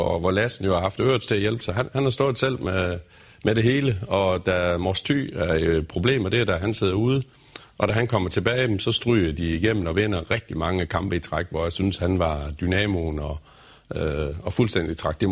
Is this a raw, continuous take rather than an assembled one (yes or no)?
yes